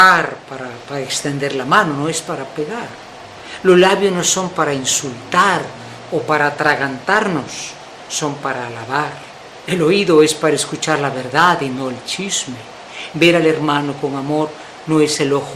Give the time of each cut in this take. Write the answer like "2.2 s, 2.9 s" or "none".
9.6 s, 13.1 s